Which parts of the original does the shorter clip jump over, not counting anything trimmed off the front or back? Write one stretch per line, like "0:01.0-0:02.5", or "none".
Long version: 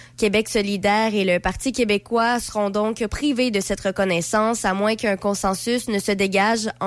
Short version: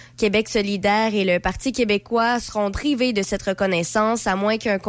0:02.7-0:03.1